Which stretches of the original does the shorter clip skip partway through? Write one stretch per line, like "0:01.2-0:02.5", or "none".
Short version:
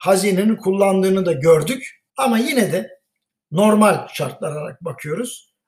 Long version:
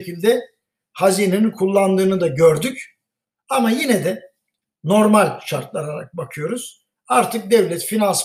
0:03.0-0:03.4